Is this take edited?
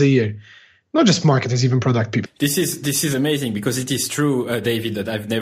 yes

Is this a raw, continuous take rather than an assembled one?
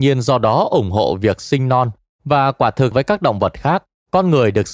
no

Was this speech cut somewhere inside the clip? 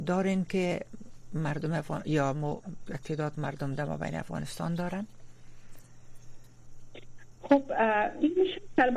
no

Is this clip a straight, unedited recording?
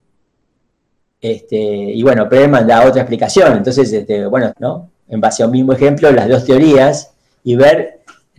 no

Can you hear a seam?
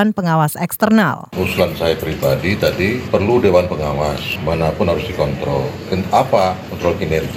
no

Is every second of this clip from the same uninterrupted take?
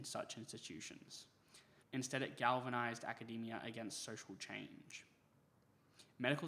no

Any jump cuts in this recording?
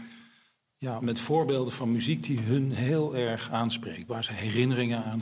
yes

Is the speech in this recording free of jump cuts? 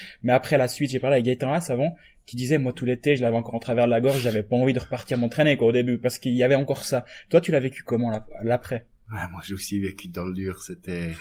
yes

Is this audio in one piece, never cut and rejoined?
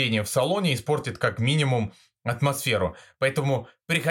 yes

